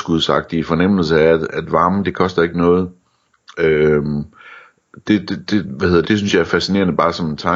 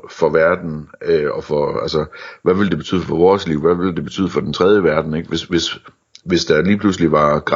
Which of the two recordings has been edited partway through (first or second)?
first